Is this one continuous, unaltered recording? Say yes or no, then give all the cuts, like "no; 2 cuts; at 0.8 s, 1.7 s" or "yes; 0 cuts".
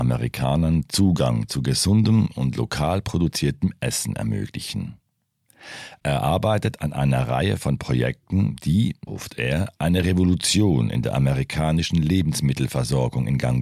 no; 1 cut; at 9.1 s